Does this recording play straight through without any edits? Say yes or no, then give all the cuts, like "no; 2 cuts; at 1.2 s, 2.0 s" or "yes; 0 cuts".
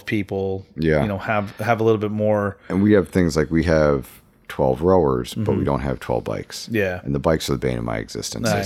yes; 0 cuts